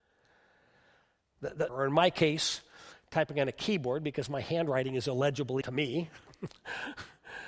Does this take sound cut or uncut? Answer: cut